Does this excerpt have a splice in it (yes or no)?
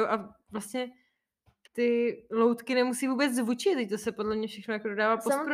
yes